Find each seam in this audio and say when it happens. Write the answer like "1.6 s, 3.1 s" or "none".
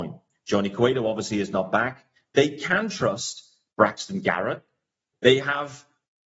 2.2 s, 5.1 s